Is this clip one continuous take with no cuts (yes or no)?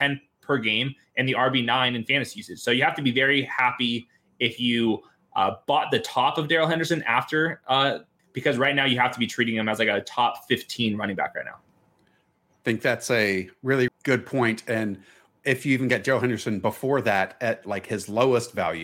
no